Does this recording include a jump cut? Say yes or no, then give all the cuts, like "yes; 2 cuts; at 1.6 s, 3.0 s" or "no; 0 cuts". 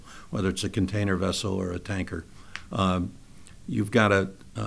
no; 0 cuts